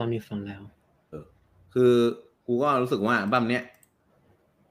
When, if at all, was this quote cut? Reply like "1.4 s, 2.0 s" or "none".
1.1 s